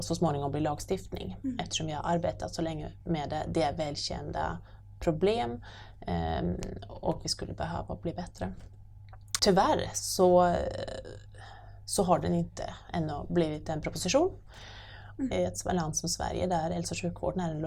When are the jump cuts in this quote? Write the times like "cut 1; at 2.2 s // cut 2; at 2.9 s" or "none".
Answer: cut 1; at 9.4 s // cut 2; at 15.2 s

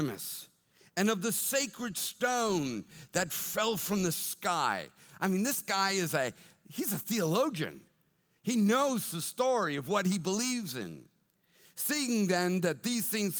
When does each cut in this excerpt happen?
none

